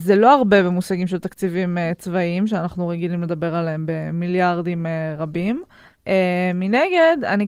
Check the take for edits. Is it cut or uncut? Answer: uncut